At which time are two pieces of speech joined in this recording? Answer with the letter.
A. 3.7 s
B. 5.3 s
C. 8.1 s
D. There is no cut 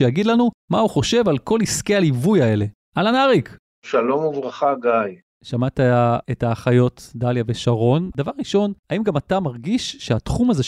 C